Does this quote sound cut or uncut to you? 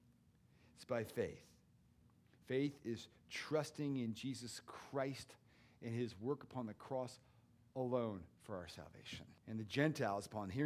cut